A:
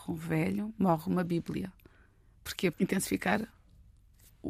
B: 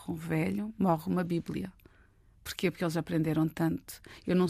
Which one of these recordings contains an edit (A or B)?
A